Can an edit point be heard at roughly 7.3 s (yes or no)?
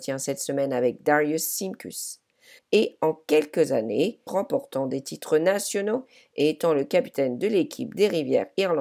no